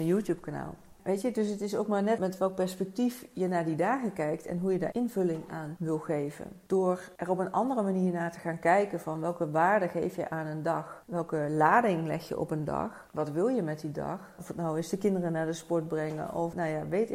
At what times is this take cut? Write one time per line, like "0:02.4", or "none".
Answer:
0:14.4